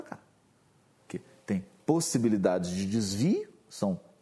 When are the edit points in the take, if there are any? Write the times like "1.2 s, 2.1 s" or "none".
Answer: 1.0 s